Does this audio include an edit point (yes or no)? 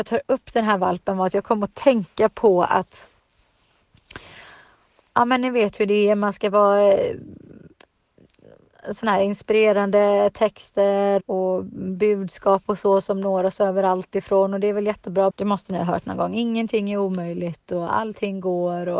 yes